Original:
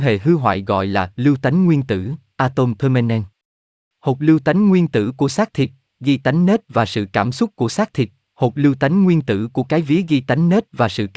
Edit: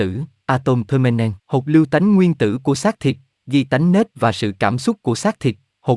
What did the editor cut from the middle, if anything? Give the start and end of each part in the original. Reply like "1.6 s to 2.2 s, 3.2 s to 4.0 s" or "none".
3.3 s to 3.9 s

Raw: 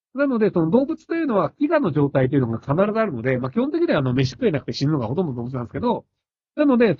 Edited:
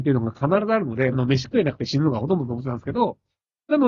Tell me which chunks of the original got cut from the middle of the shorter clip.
3.4 s to 4.0 s

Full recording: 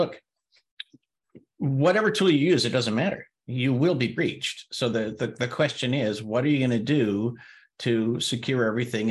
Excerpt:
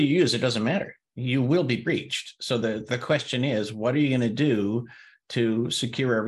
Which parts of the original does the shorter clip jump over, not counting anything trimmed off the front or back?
5.2 s to 5.4 s

